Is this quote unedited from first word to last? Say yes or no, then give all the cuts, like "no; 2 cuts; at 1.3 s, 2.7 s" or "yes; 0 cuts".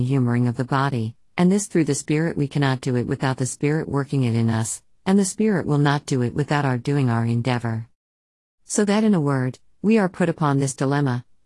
yes; 0 cuts